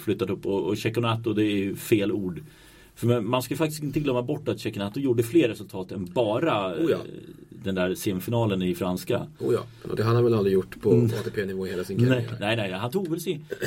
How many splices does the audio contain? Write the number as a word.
one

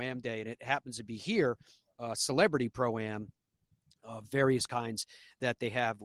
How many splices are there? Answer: zero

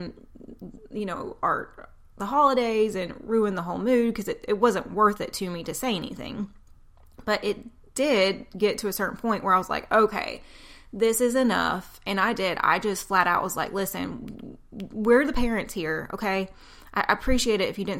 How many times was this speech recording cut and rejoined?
zero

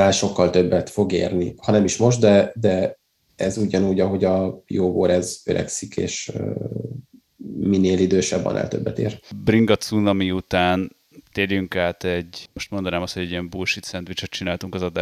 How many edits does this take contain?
zero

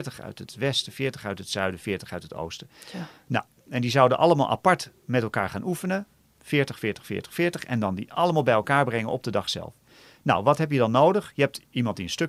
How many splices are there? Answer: zero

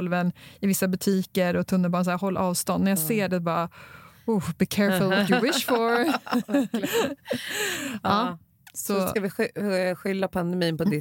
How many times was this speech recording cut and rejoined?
zero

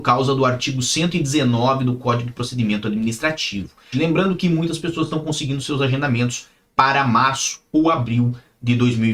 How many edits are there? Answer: one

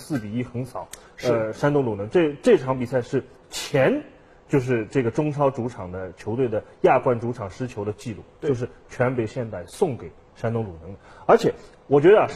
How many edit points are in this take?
zero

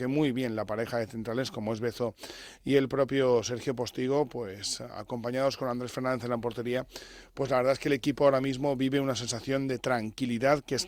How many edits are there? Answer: zero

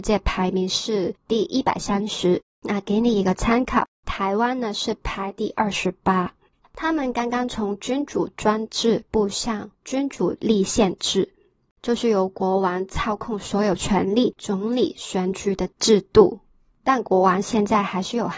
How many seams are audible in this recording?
two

